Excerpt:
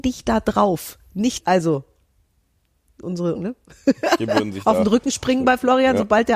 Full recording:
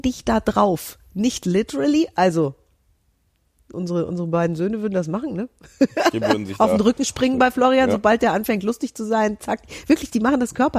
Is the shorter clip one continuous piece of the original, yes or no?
no